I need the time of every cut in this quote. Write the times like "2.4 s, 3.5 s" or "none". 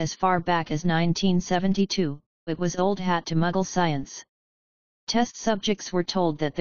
2.5 s